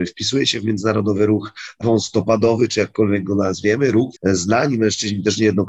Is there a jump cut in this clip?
yes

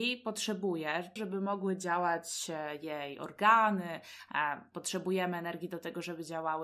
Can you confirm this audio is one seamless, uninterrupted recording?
no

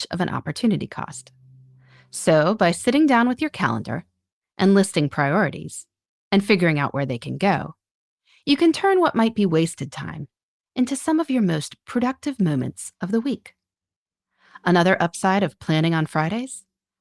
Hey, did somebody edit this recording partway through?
no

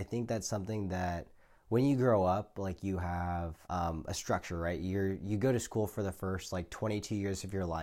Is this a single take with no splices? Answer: no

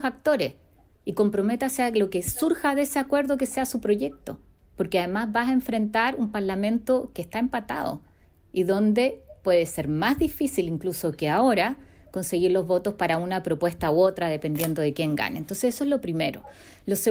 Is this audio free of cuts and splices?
yes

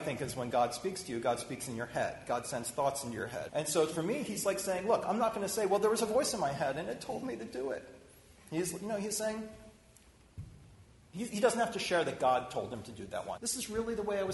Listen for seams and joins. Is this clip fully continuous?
no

